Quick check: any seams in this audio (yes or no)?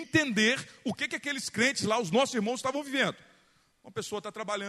no